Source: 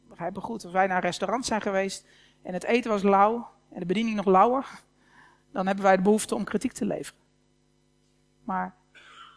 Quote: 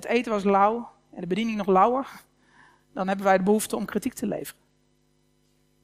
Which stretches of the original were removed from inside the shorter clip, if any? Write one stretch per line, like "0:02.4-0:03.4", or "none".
none